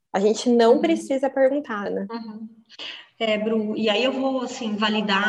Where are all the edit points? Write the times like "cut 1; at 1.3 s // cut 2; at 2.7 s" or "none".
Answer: cut 1; at 1.9 s